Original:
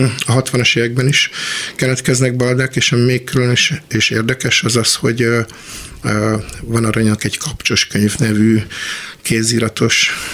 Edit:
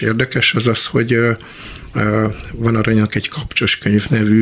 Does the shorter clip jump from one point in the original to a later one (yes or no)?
no